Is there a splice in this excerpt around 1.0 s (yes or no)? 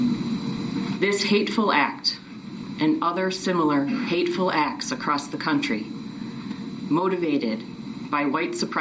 no